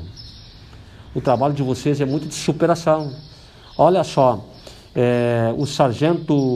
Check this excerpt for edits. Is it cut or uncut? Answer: uncut